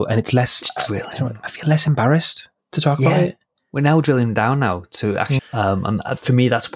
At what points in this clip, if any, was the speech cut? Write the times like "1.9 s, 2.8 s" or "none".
5.4 s